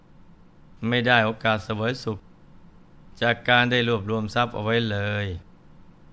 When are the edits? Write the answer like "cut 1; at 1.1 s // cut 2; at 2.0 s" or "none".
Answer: none